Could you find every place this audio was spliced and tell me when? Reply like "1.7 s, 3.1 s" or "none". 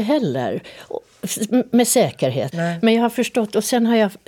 2.5 s